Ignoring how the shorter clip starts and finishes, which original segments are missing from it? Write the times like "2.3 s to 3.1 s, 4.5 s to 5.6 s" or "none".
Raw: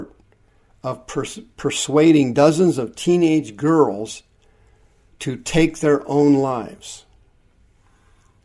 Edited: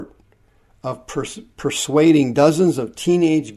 none